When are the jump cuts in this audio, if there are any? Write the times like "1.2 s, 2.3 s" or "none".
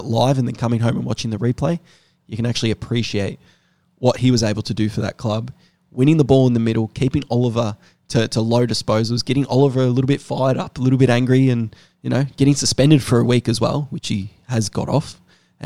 none